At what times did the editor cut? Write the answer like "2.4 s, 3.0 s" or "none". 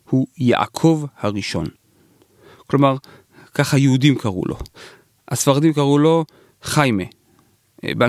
none